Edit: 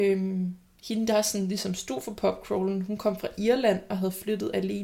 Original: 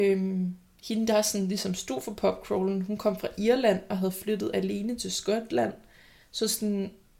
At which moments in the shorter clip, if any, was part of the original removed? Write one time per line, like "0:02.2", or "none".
none